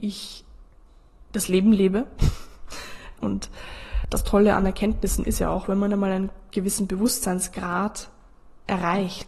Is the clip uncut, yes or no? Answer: no